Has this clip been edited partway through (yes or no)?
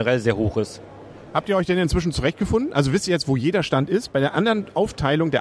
no